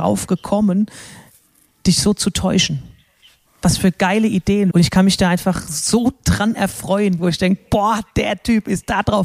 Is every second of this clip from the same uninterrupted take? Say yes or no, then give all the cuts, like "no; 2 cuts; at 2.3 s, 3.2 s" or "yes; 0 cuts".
no; 2 cuts; at 4.7 s, 7.2 s